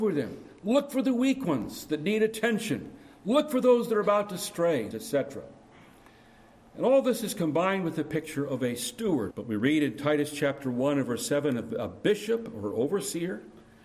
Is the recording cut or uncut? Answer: cut